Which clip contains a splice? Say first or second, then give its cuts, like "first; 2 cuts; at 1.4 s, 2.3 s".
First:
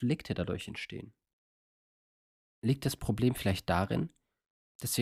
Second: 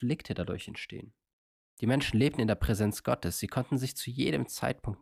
second; 1 cut; at 1.7 s